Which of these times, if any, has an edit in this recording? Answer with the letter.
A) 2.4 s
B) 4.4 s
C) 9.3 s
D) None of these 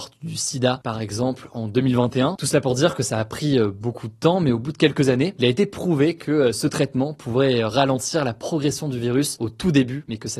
A